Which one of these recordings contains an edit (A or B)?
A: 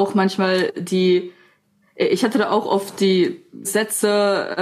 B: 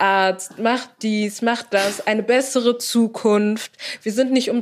A